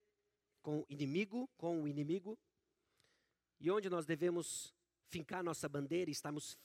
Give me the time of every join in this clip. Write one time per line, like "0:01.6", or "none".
none

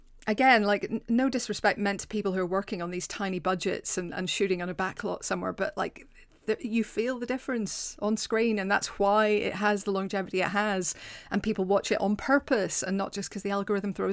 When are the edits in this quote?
none

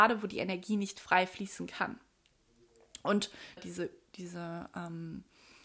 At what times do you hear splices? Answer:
0:03.6

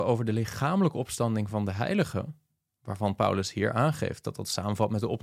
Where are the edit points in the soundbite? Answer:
none

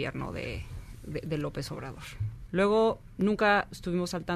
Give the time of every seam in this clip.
0:02.5

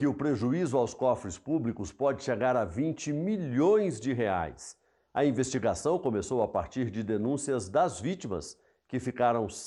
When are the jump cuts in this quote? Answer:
none

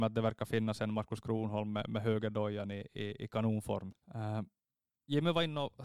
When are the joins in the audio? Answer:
0:03.9

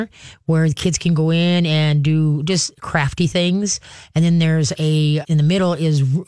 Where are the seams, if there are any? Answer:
0:05.2

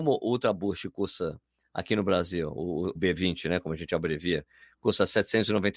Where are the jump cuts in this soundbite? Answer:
0:03.0

